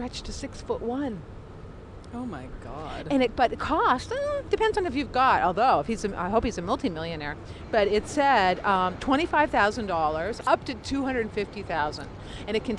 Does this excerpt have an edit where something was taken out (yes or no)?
yes